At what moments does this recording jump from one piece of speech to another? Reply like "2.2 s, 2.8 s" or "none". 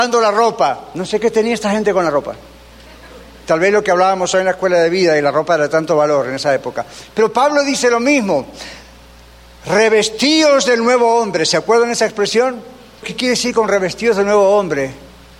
13.0 s